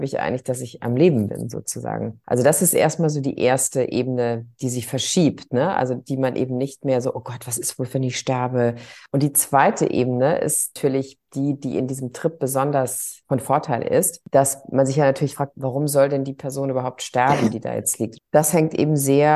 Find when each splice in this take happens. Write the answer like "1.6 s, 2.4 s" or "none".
18.2 s